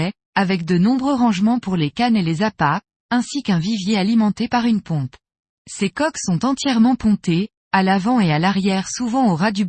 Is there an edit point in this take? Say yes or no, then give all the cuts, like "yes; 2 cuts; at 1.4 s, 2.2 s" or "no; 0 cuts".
yes; 1 cut; at 5.6 s